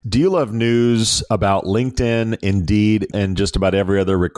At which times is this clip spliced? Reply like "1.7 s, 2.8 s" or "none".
3.1 s